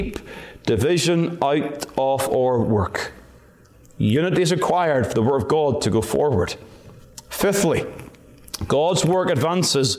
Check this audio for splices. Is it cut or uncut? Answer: uncut